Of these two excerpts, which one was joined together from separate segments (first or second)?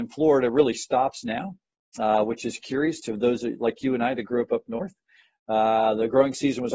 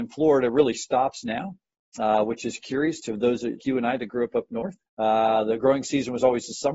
second